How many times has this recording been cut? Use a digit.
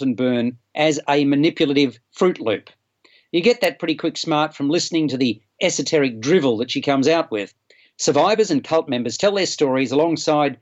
1